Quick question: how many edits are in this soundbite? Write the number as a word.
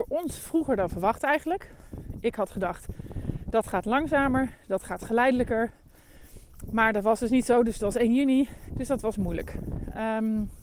one